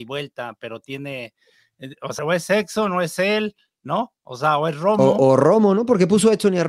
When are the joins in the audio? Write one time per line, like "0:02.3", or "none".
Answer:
0:02.2